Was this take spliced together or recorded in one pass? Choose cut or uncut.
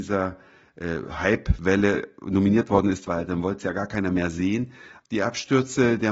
cut